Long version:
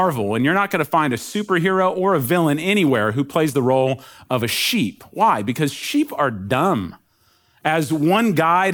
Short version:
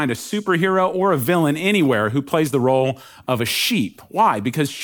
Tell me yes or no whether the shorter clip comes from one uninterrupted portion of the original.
yes